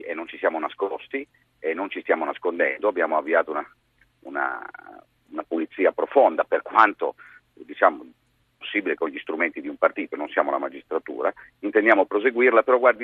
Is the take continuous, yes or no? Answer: yes